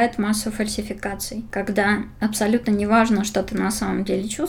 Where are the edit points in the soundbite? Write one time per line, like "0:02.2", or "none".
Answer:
none